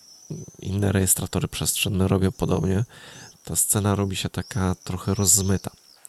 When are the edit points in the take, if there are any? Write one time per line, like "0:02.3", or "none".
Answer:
0:03.3